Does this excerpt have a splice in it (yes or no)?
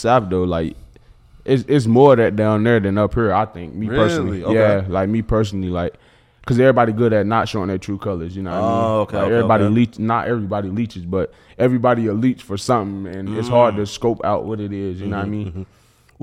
no